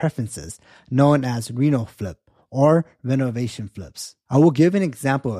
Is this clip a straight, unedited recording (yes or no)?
yes